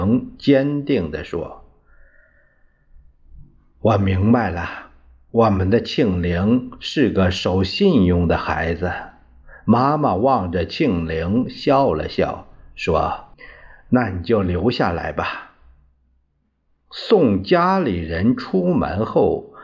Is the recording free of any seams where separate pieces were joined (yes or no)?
no